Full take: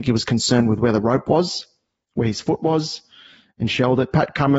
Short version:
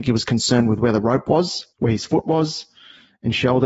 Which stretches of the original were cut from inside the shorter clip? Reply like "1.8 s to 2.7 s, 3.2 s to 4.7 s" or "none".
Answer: 1.7 s to 2.1 s